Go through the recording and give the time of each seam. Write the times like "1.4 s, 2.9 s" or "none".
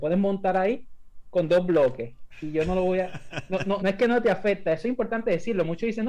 3.8 s